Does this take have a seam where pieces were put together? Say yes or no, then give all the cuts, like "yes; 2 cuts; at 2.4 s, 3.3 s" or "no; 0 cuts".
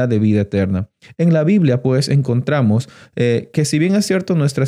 no; 0 cuts